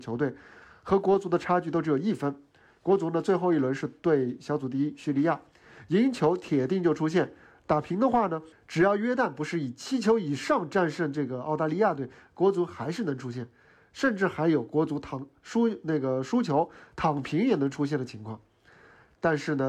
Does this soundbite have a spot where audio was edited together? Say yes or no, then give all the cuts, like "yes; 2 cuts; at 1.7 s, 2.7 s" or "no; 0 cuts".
yes; 1 cut; at 8.5 s